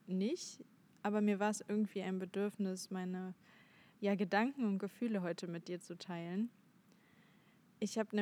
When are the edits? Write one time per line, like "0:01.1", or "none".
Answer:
none

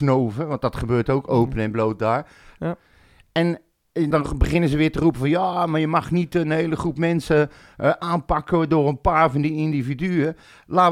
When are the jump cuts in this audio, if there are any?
0:02.6
0:04.1

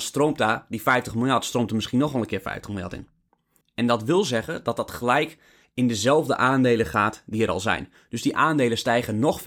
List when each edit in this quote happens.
0:03.6

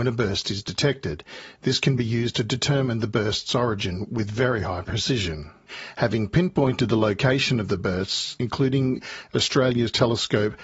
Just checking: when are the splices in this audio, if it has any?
0:08.4

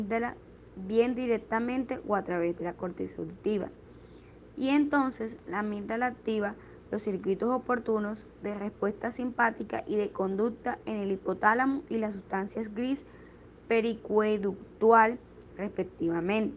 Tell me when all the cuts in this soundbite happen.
0:04.5

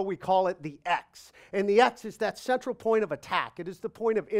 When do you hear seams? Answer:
none

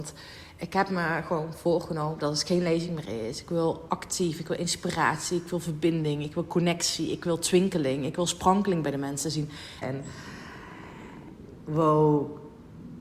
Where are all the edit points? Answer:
0:09.8

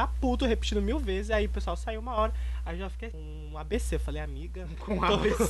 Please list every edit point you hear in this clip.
0:03.1

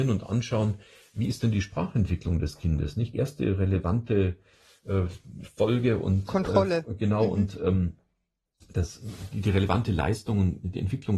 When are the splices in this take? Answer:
0:03.1

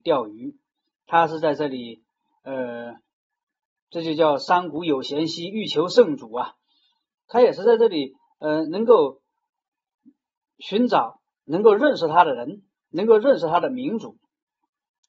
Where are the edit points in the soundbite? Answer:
none

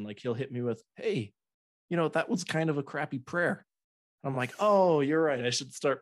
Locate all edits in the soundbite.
none

